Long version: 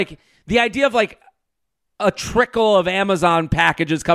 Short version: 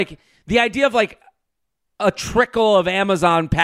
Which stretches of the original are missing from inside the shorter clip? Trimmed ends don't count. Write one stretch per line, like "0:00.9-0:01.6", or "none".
none